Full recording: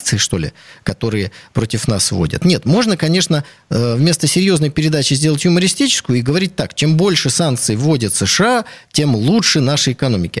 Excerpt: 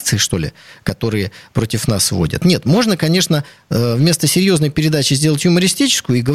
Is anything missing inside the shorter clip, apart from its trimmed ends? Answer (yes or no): no